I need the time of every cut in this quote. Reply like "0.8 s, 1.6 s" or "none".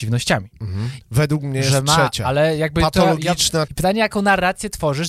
1.0 s, 3.7 s